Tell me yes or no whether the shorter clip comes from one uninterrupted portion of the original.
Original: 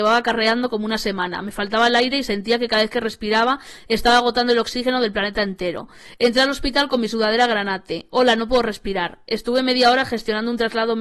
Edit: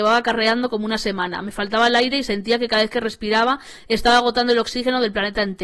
yes